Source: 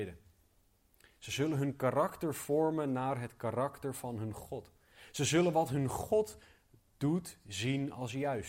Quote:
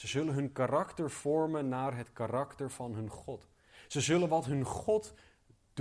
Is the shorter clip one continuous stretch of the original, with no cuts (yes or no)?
yes